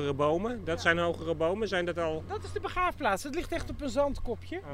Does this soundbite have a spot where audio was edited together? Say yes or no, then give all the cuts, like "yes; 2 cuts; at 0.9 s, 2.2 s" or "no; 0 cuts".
no; 0 cuts